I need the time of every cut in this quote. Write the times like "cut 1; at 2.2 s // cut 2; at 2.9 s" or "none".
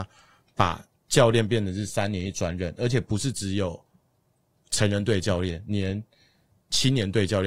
none